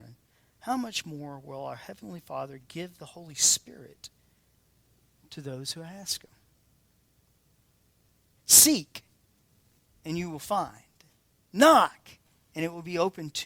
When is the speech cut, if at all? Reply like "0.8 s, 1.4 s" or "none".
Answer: 8.4 s